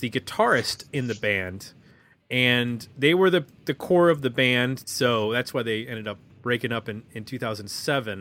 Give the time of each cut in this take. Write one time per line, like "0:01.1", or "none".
0:04.8